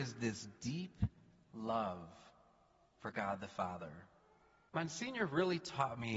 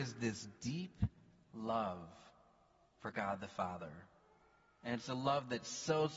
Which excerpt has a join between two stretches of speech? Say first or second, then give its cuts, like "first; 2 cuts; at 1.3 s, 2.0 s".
first; 1 cut; at 4.7 s